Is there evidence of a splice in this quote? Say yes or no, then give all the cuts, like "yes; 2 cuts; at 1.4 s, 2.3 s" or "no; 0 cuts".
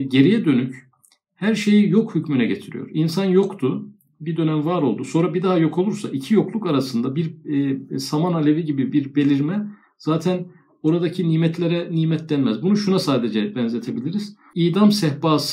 no; 0 cuts